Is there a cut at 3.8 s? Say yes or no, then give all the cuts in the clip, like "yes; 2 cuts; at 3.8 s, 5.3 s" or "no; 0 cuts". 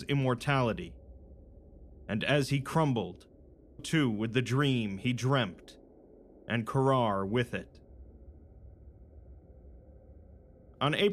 yes; 1 cut; at 3.8 s